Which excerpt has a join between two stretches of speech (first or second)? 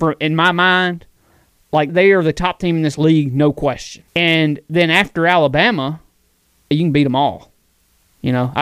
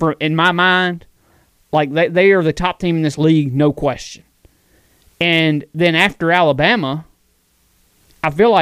first